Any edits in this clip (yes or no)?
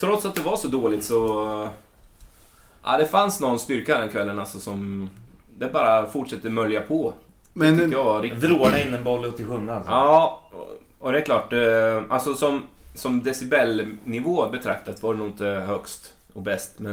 no